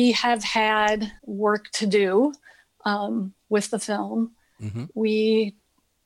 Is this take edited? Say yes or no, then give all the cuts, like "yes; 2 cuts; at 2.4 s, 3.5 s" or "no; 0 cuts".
no; 0 cuts